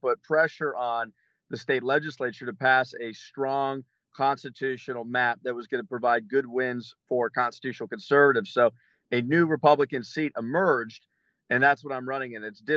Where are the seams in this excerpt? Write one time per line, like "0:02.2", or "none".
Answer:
none